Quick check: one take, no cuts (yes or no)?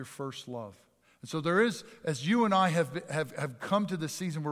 yes